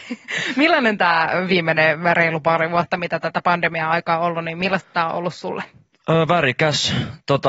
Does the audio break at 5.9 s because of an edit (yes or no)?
no